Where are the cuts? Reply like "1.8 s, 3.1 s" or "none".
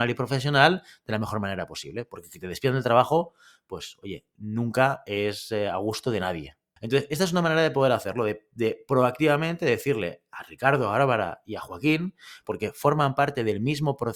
6.8 s, 12.4 s